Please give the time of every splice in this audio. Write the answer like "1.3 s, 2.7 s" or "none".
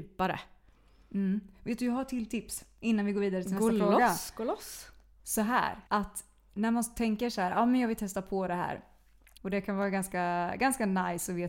5.9 s, 9.4 s

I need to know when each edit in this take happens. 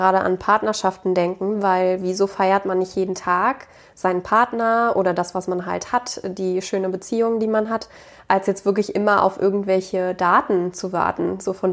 none

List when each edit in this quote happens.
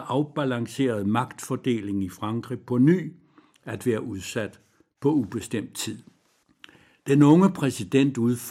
none

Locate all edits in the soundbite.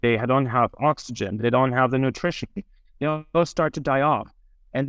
none

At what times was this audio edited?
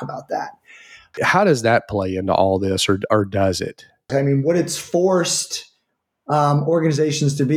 1.1 s, 4.1 s

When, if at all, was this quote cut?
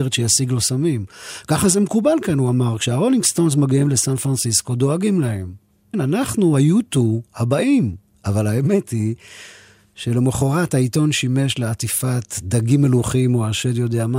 5.9 s

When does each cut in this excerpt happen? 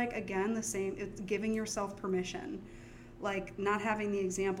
none

